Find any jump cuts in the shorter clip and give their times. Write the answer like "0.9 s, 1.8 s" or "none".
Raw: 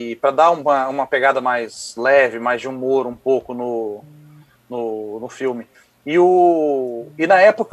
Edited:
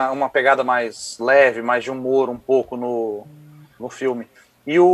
3.8 s